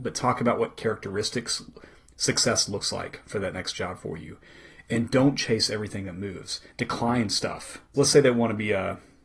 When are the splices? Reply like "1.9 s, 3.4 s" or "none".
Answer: 6.7 s, 7.9 s

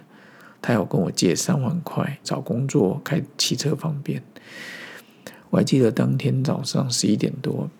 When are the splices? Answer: 2.2 s, 5.4 s

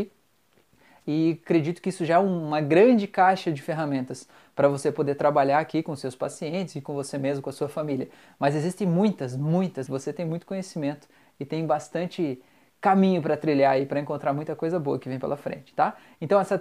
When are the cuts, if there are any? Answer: 9.9 s

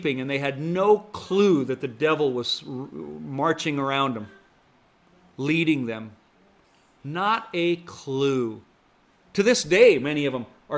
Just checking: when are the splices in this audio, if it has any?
none

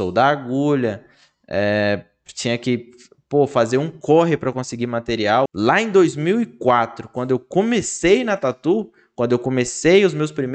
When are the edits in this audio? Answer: 5.5 s

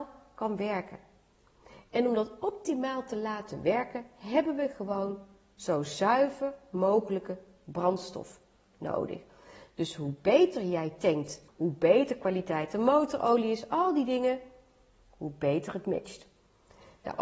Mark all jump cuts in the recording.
11.5 s

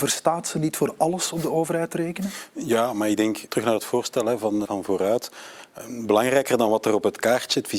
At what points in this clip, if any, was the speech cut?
3.5 s, 4.6 s

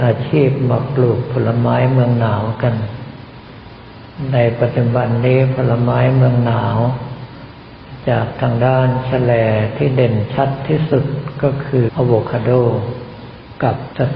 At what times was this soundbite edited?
11.9 s

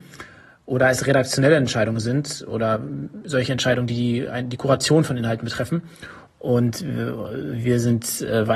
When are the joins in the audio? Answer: 6.3 s

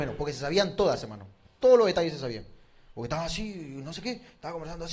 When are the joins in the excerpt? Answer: none

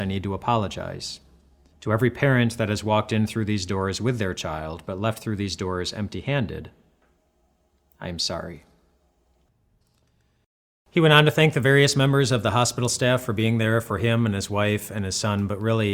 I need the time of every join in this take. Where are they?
1.7 s

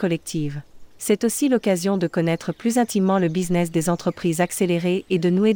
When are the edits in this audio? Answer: none

